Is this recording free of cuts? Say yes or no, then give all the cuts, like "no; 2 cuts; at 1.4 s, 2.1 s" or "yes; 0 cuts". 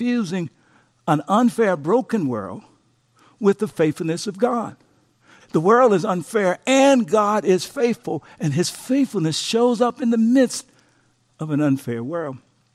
no; 1 cut; at 5.4 s